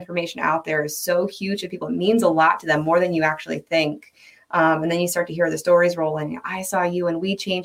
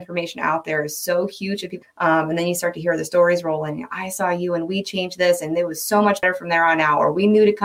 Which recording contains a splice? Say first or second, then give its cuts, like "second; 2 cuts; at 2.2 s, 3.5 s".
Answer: second; 1 cut; at 1.8 s